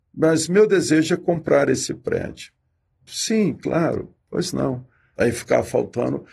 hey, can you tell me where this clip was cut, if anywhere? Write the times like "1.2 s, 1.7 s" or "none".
3.1 s, 5.2 s